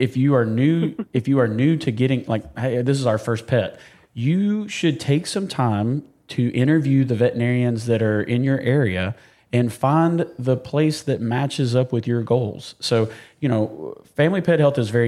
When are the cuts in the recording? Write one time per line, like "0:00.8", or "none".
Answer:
none